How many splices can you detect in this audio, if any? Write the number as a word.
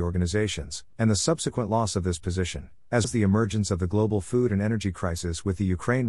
two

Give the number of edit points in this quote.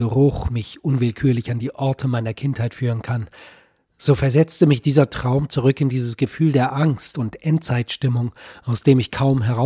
zero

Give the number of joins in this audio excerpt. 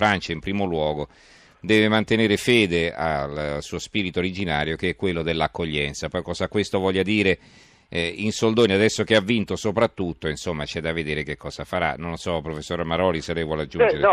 zero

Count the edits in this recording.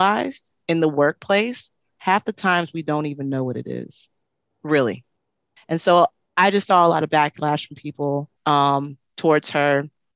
two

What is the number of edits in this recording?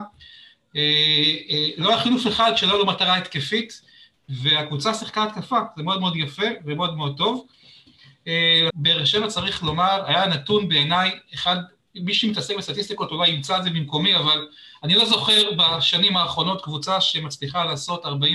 one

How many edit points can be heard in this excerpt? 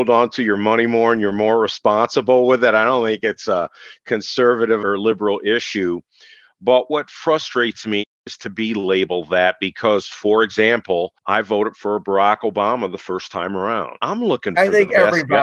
zero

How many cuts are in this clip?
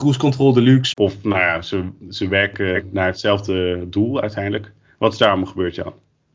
one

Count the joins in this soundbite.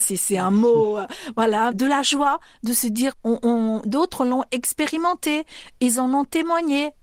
two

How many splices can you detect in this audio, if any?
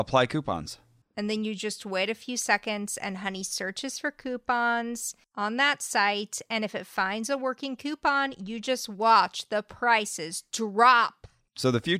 one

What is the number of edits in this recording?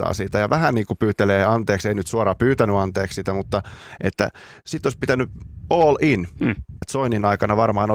one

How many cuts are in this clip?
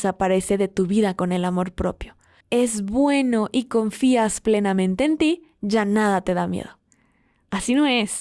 one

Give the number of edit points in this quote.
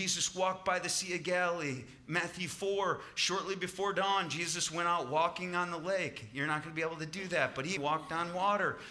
one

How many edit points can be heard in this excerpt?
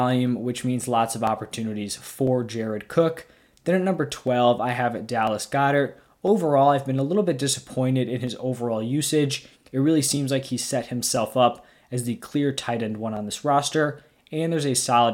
one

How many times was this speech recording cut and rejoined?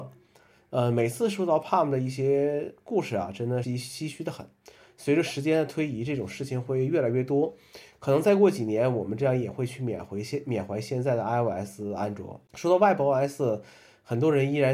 two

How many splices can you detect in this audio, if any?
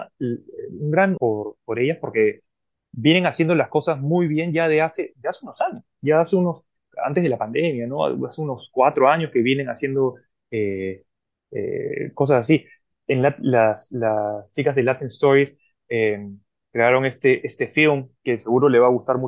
one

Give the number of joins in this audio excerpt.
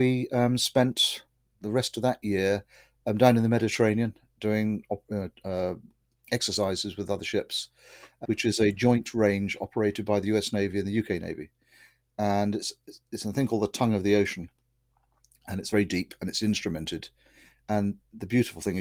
two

